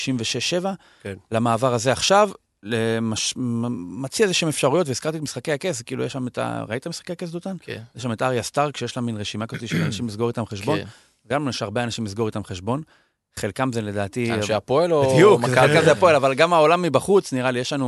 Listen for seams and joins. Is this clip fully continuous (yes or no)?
yes